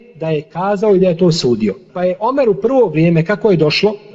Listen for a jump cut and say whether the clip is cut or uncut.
cut